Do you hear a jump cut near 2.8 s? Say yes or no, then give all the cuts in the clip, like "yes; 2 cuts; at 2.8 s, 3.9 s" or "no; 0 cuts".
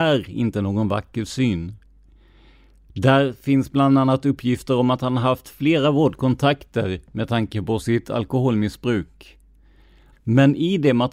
no; 1 cut; at 10.1 s